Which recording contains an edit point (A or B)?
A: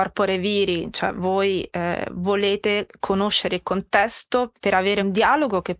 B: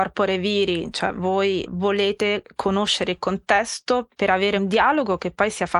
B